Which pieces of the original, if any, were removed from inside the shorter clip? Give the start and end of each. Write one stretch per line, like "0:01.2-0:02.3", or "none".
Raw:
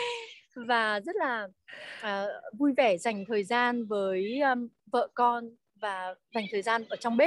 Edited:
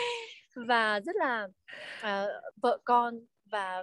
0:02.5-0:04.8